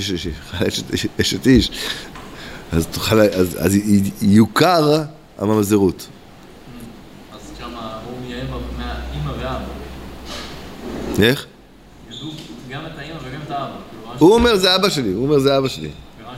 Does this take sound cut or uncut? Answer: uncut